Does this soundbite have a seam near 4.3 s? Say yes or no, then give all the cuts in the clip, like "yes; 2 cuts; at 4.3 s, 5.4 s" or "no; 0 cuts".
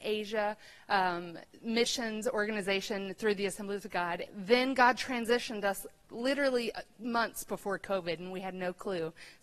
yes; 1 cut; at 4.3 s